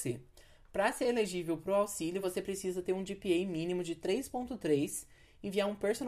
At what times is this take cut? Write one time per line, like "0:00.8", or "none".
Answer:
none